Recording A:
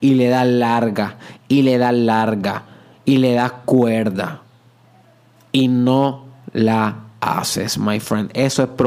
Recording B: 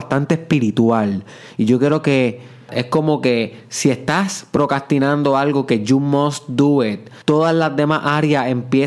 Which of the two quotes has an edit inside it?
B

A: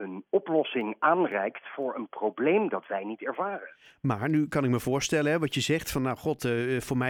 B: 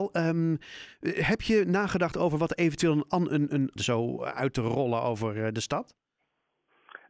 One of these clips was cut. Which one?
B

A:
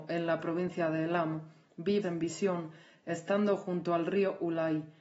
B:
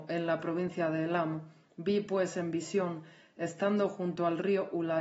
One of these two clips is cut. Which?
A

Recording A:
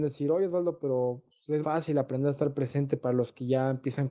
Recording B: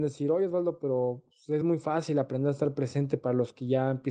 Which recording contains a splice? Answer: A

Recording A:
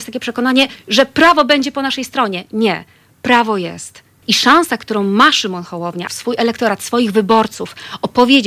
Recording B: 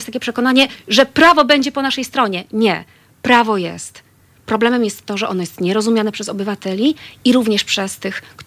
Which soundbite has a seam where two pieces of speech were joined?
A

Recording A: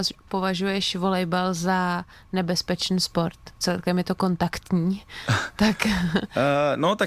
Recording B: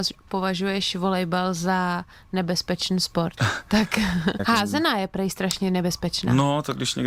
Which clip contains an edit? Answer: B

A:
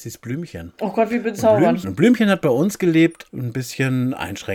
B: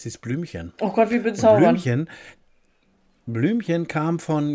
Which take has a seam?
A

